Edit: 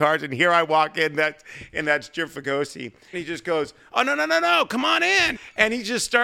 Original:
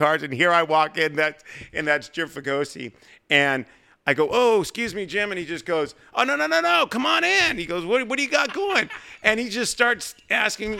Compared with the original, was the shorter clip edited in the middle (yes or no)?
yes